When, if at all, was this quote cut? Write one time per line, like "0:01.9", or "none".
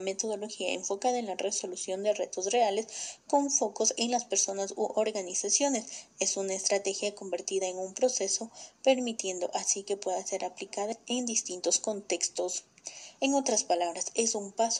0:13.1

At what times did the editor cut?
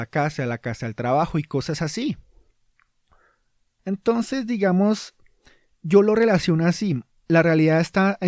none

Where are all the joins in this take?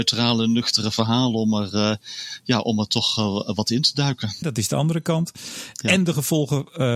0:04.4

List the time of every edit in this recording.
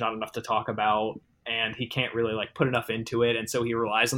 none

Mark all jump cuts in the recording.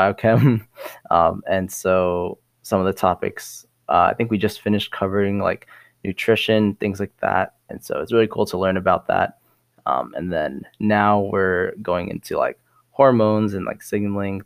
0:07.7

